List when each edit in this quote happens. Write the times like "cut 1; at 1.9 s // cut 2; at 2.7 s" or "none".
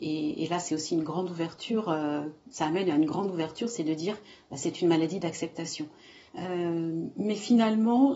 cut 1; at 2.4 s // cut 2; at 6.3 s